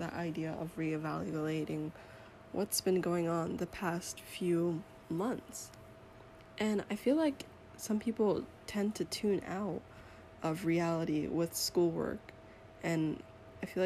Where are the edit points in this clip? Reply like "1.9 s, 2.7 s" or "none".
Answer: none